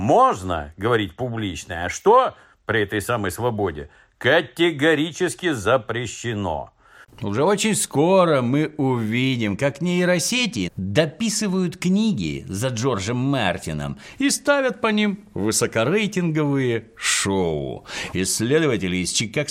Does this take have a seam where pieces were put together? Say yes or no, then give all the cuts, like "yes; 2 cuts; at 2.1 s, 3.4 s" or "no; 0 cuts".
yes; 3 cuts; at 7.0 s, 10.7 s, 18.1 s